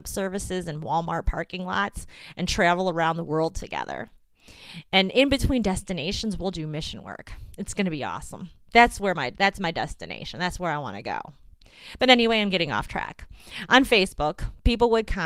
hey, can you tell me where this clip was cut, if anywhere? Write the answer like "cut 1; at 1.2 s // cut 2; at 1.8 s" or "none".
none